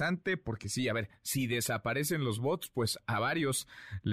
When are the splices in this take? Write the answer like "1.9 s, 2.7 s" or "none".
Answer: none